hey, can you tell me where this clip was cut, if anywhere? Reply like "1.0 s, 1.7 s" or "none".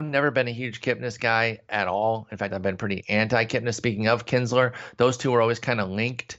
none